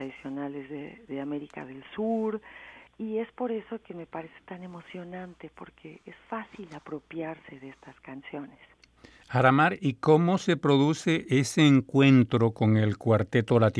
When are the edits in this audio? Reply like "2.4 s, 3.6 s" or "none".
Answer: 2.9 s